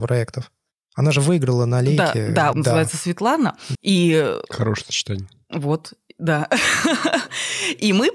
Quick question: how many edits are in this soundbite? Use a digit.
2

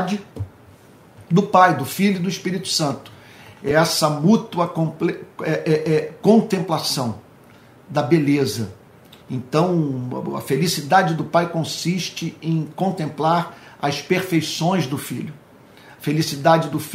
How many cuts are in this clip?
0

